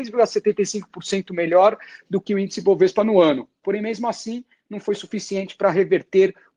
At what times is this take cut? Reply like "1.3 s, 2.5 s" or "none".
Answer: none